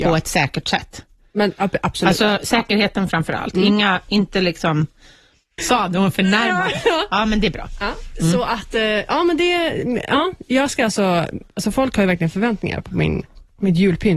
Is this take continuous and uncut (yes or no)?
no